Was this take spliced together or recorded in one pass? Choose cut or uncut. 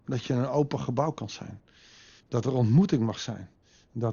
cut